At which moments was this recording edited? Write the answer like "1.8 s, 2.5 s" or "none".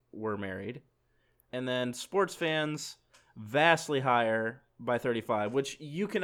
1.5 s